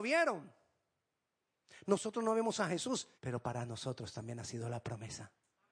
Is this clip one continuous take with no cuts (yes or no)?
no